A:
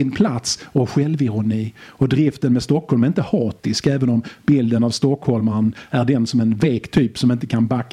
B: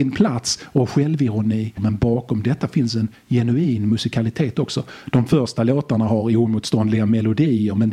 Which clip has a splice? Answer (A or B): B